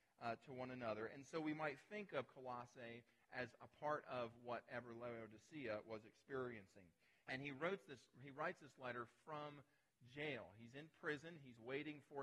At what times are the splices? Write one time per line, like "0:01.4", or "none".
0:07.2